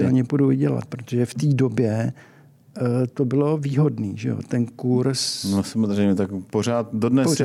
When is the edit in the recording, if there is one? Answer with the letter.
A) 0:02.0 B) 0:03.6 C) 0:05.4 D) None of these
D